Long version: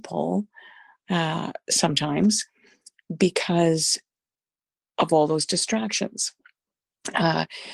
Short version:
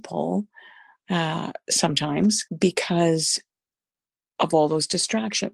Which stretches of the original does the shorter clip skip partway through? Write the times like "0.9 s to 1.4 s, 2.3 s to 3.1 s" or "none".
2.5 s to 3.1 s